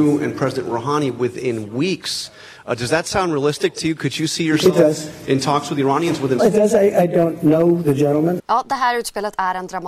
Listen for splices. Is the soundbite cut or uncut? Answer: cut